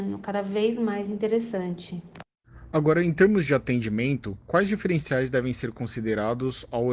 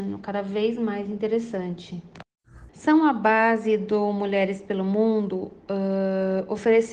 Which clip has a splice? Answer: second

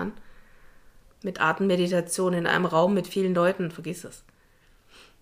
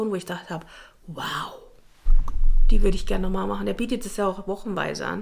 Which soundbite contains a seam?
first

